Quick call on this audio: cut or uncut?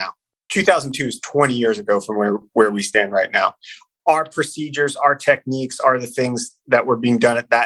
uncut